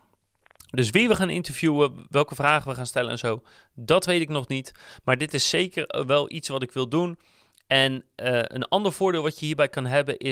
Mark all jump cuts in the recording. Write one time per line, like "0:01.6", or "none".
none